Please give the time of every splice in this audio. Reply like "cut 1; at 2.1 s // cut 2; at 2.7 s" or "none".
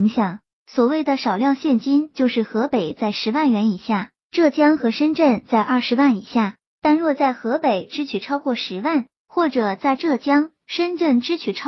none